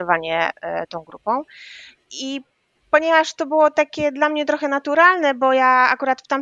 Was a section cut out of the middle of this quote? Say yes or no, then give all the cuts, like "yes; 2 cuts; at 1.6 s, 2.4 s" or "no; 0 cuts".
no; 0 cuts